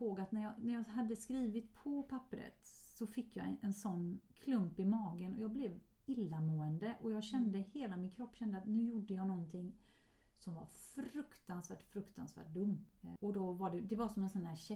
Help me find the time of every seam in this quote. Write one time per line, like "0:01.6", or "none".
0:04.3
0:13.2